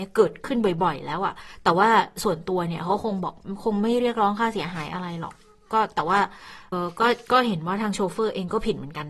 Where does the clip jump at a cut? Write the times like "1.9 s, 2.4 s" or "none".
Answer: 6.7 s